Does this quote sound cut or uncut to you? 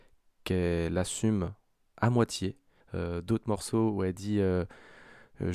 cut